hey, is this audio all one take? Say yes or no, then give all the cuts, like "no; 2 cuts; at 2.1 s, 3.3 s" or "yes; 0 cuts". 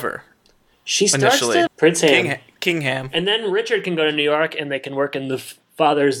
no; 1 cut; at 1.7 s